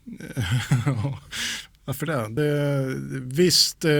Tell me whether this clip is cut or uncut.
uncut